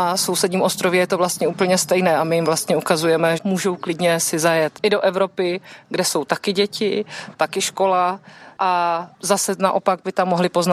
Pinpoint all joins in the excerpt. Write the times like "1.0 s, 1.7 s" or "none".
3.4 s, 7.3 s